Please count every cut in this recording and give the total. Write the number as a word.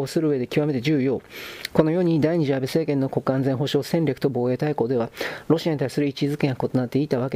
one